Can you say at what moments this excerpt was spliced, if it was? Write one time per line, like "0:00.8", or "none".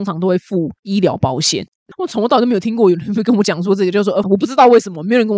0:01.9
0:04.2